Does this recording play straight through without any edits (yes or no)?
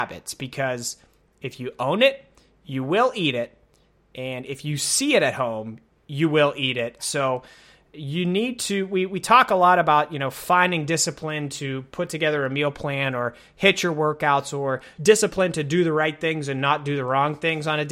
no